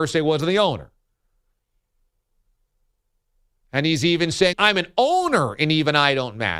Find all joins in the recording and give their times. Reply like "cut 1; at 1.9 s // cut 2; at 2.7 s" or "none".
cut 1; at 4.5 s